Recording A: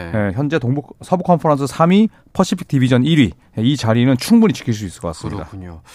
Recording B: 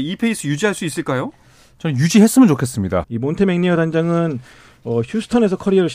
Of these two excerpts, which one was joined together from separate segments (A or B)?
B